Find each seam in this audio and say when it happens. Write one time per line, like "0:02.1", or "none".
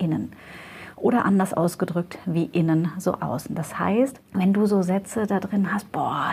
0:04.2